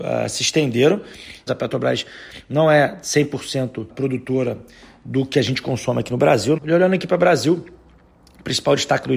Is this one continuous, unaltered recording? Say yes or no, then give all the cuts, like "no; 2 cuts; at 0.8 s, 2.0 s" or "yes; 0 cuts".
no; 3 cuts; at 1.5 s, 3.9 s, 6.6 s